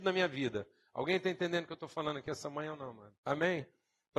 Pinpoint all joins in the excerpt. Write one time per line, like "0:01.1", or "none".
0:03.2